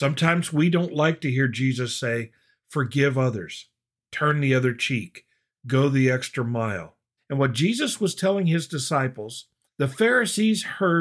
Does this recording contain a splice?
yes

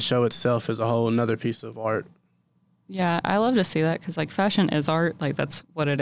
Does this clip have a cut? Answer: yes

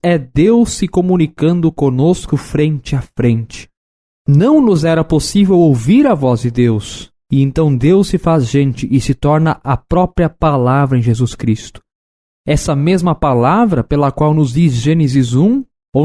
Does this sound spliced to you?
no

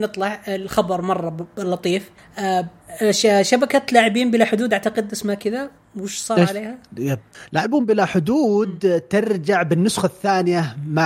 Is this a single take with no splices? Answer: yes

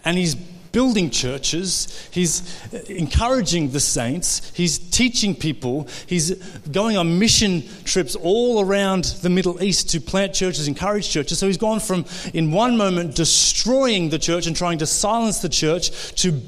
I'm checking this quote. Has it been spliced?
no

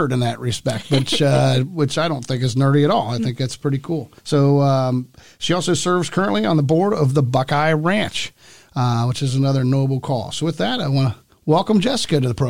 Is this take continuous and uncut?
no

